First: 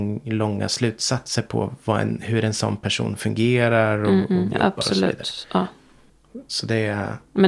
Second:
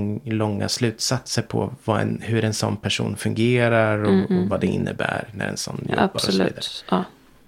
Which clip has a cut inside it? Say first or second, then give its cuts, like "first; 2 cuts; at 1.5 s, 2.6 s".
first; 1 cut; at 4.5 s